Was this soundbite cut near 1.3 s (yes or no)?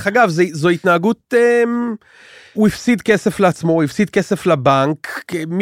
no